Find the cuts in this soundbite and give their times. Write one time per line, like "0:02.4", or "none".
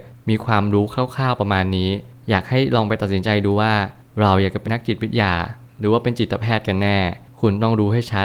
0:04.6